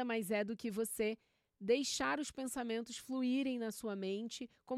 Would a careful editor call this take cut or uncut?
uncut